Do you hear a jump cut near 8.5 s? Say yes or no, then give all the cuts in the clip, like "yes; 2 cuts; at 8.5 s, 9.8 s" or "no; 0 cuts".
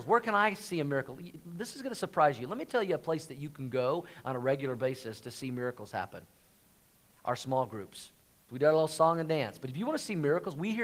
yes; 1 cut; at 8.5 s